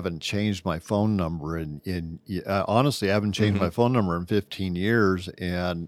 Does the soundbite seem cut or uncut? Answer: uncut